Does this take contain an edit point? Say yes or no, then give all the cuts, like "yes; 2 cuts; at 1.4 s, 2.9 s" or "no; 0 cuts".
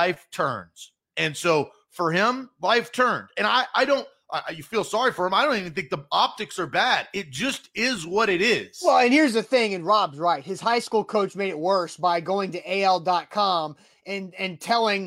no; 0 cuts